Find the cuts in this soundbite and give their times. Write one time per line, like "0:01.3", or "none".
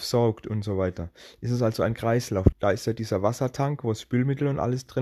0:02.5